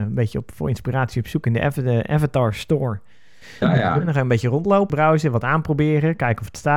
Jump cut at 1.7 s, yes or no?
no